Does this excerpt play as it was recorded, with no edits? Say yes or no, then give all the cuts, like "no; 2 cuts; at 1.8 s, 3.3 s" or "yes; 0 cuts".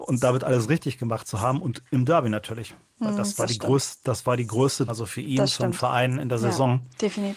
no; 1 cut; at 4.9 s